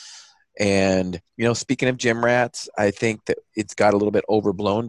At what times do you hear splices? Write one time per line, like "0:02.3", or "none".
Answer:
0:01.3